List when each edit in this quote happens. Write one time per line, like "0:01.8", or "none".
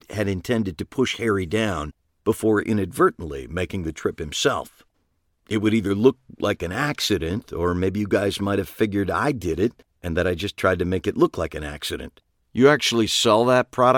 0:12.4

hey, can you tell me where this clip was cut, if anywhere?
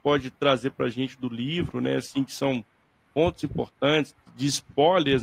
none

